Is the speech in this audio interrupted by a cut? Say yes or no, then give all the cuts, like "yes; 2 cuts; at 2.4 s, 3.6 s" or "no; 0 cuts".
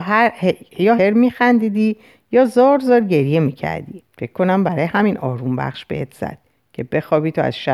yes; 2 cuts; at 1.0 s, 4.1 s